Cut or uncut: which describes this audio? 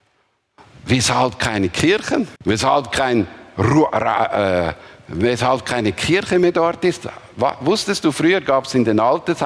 cut